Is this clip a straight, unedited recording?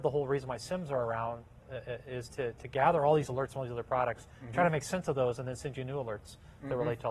no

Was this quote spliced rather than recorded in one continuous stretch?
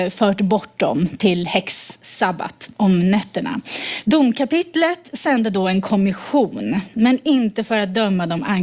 yes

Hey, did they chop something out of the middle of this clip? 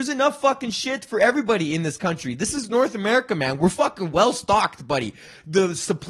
no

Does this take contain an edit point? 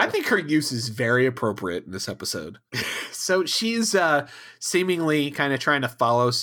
yes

